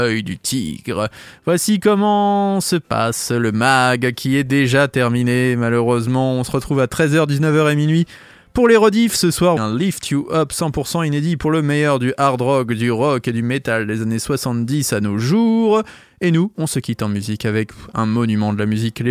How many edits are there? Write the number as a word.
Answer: one